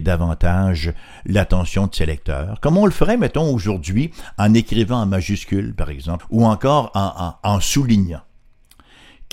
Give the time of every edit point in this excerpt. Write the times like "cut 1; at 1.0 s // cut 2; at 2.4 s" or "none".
cut 1; at 6.2 s